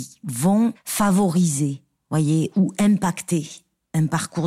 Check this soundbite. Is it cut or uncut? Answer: uncut